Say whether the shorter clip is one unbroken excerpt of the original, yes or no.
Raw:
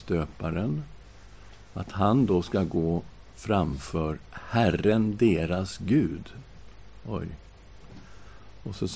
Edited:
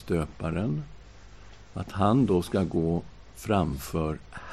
yes